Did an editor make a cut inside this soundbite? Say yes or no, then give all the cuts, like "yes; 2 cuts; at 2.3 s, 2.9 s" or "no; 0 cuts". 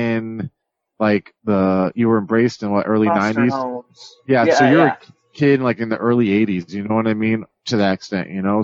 no; 0 cuts